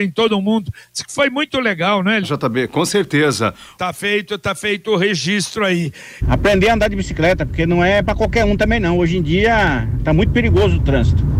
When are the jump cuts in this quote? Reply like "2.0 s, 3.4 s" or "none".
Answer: 2.2 s, 3.8 s, 6.2 s